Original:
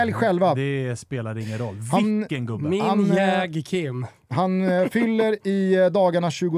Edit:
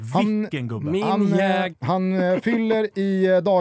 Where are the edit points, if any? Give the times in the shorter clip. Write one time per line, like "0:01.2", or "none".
0:01.7